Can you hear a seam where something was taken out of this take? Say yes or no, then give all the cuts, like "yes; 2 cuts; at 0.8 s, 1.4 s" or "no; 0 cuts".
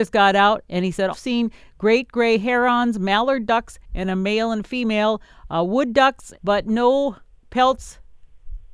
yes; 2 cuts; at 1.1 s, 6.3 s